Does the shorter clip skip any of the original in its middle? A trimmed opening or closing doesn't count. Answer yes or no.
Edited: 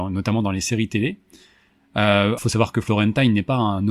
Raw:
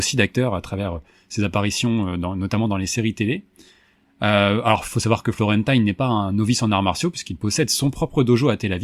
yes